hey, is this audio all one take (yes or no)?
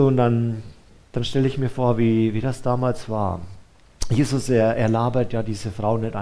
yes